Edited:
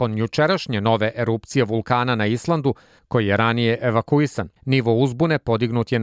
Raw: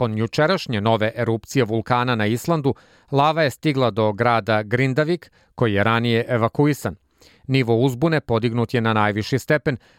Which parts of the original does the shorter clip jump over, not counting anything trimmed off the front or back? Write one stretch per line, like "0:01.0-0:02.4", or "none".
0:03.0-0:05.5
0:07.0-0:07.4